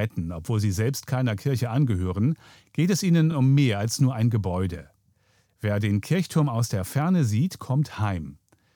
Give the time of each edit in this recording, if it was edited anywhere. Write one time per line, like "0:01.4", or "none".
none